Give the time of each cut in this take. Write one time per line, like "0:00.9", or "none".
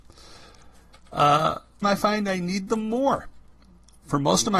0:01.8